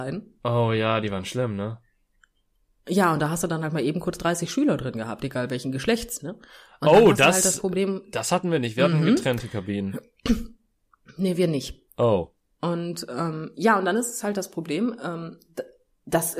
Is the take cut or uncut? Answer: uncut